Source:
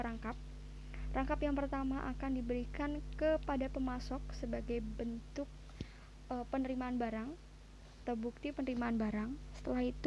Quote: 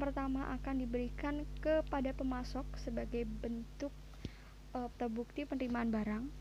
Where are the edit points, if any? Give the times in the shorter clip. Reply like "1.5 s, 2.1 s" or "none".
4.9 s